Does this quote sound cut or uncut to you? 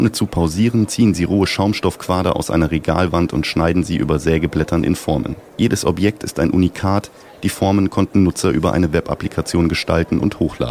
cut